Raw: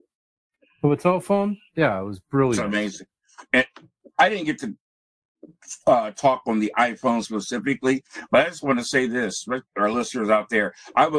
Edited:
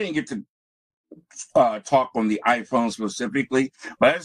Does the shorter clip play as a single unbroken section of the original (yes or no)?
yes